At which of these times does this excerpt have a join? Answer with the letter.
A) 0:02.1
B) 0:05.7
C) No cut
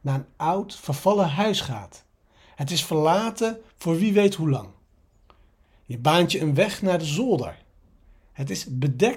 C